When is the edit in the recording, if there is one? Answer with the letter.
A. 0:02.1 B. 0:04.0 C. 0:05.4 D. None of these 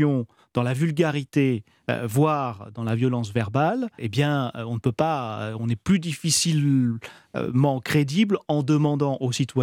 B